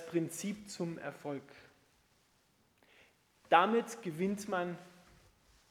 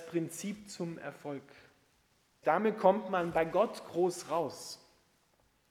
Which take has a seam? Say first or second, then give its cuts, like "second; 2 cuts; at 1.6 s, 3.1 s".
second; 1 cut; at 2.4 s